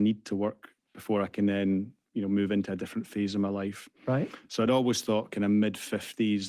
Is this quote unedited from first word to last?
yes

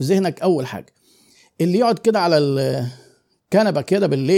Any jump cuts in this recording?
no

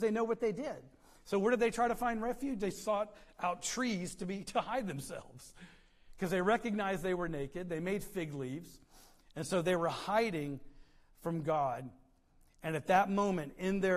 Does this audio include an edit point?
no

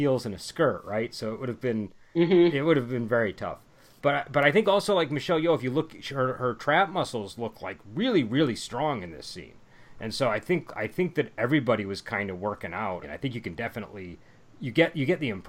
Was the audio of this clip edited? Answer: yes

